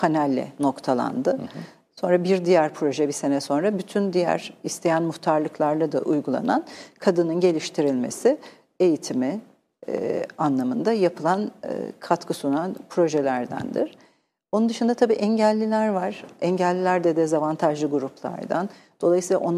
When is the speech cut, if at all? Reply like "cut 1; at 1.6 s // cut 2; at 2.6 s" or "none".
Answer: none